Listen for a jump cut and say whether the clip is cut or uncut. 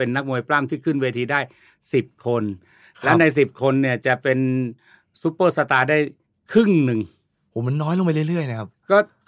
uncut